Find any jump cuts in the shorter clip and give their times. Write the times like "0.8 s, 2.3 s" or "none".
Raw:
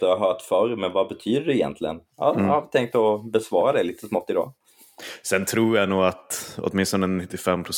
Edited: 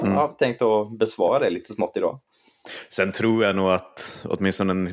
none